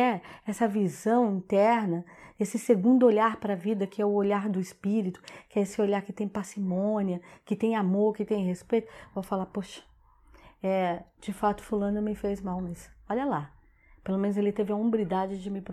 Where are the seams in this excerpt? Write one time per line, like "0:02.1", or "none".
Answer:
none